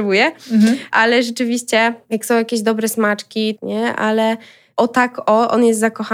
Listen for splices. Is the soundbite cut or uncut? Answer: cut